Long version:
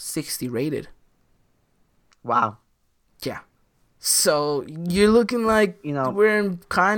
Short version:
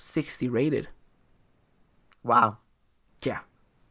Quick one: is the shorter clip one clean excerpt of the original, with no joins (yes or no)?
yes